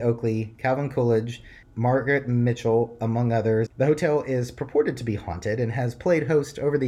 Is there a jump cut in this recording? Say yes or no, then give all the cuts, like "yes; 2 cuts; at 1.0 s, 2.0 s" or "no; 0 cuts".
yes; 2 cuts; at 1.6 s, 3.7 s